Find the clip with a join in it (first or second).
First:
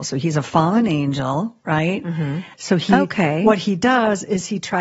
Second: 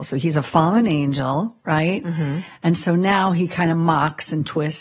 first